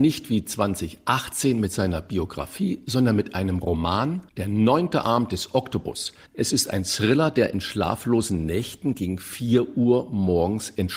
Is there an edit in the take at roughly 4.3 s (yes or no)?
yes